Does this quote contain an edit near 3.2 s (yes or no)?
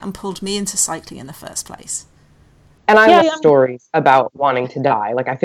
yes